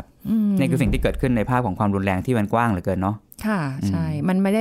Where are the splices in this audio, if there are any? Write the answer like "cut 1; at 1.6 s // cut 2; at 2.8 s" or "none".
none

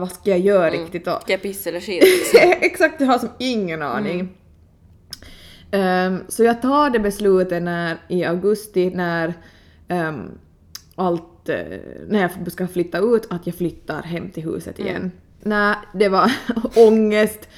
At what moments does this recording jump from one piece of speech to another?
cut 1; at 15.4 s

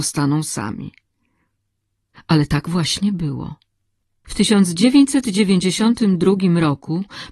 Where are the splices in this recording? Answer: cut 1; at 2.1 s

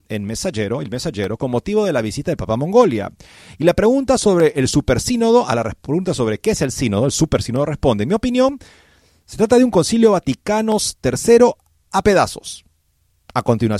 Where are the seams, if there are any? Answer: none

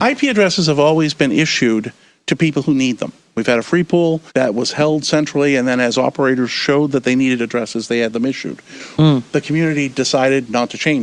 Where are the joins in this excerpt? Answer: cut 1; at 4.3 s // cut 2; at 9.0 s

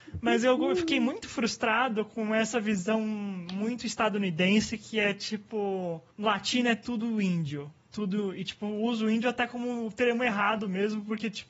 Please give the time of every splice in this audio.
cut 1; at 6.1 s

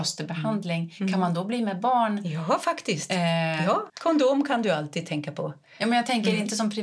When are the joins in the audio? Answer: cut 1; at 3.9 s

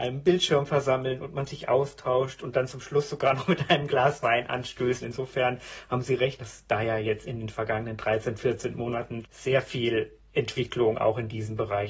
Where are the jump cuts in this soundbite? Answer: cut 1; at 5.0 s // cut 2; at 6.4 s // cut 3; at 9.2 s

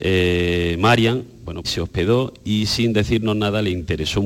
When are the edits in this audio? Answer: cut 1; at 1.6 s

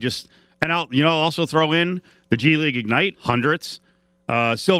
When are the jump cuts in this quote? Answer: cut 1; at 3.1 s

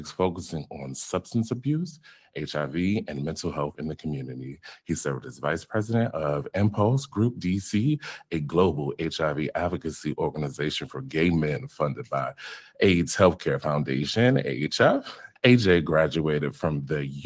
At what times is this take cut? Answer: cut 1; at 15.4 s

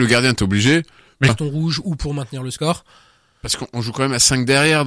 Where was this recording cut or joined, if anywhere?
cut 1; at 1.3 s

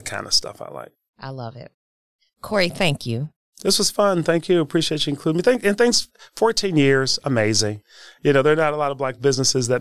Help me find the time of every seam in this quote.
none

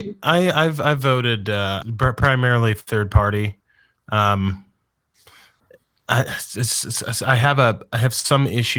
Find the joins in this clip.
cut 1; at 1.8 s

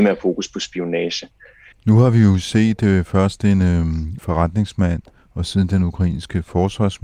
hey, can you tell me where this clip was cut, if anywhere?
cut 1; at 1.7 s // cut 2; at 4.2 s

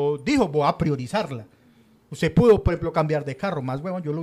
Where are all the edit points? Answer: none

